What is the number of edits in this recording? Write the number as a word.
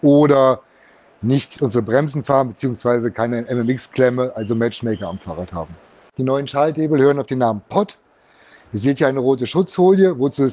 zero